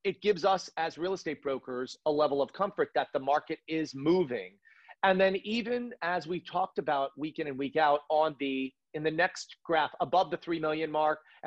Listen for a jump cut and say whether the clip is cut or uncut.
uncut